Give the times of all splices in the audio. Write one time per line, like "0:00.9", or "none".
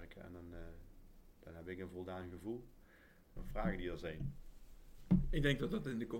0:03.4